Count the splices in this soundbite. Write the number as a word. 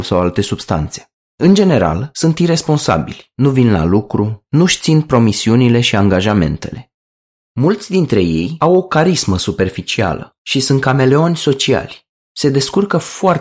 one